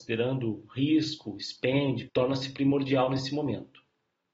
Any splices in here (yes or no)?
yes